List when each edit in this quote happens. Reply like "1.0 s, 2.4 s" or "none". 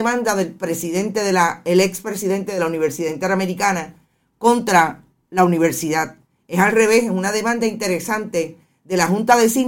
none